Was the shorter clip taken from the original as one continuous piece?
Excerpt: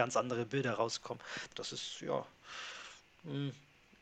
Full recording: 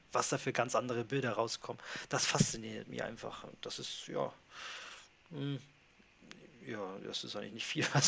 no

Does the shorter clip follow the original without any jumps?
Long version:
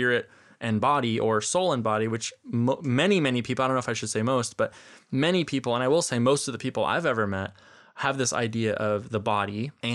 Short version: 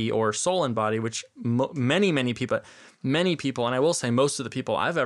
no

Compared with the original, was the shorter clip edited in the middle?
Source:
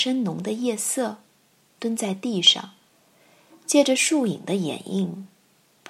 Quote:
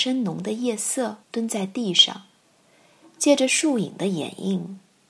yes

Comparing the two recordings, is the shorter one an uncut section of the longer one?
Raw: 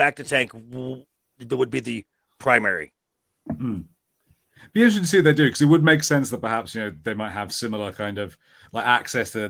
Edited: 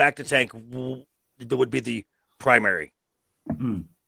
yes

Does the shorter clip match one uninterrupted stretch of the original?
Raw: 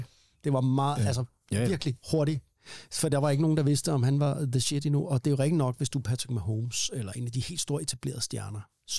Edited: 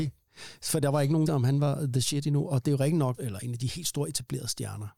no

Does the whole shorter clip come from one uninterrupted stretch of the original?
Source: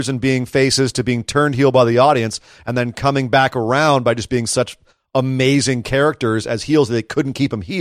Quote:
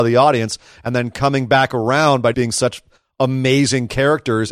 no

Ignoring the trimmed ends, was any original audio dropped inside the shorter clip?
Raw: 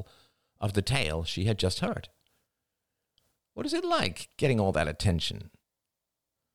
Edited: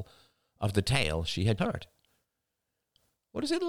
yes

